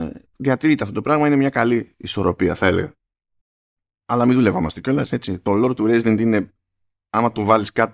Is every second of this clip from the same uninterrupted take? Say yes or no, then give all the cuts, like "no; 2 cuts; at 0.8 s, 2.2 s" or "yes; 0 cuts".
yes; 0 cuts